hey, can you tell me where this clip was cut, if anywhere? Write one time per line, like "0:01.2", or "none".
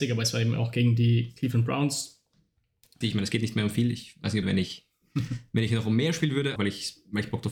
0:03.0
0:04.4
0:06.6

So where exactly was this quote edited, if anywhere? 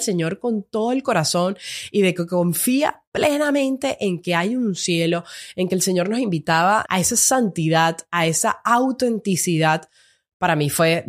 0:06.9

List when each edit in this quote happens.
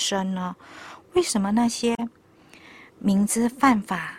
none

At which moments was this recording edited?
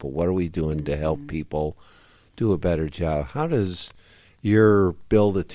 none

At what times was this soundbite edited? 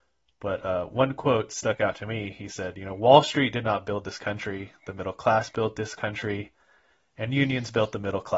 none

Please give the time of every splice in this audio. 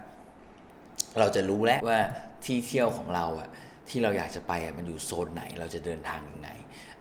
0:01.8

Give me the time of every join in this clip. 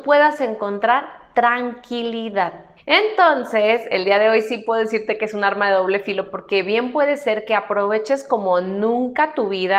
0:02.8

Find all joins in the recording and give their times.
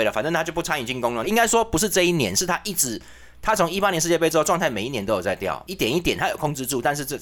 0:01.2

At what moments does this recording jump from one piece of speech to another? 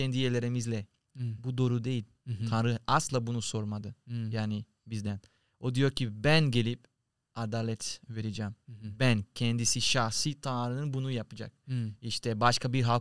none

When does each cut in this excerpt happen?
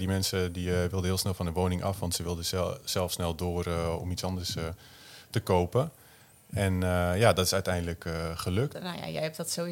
0:08.7

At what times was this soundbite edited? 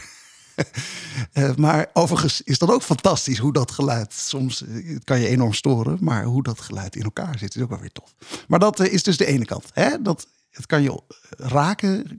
none

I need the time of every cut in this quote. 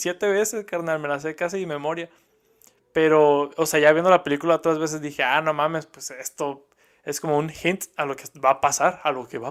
none

